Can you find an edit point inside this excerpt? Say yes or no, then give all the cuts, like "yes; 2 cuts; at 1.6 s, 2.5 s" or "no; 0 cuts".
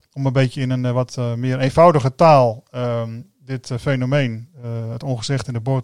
no; 0 cuts